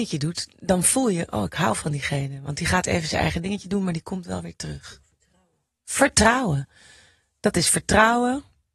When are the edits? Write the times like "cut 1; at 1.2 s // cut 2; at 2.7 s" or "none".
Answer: none